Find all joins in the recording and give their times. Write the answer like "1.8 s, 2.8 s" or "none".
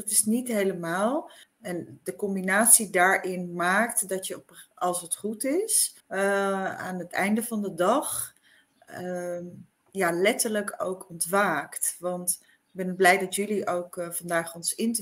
1.4 s, 6.0 s